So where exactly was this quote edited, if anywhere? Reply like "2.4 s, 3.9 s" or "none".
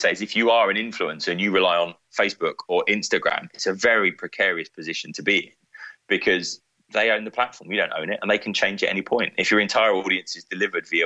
none